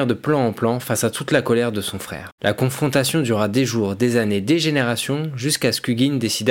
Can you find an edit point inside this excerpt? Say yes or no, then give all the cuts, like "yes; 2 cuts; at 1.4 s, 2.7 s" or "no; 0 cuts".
no; 0 cuts